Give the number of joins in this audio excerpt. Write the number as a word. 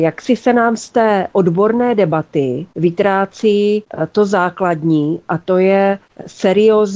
zero